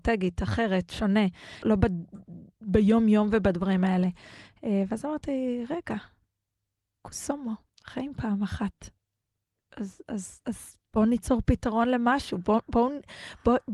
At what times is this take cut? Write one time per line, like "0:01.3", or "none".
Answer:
0:01.6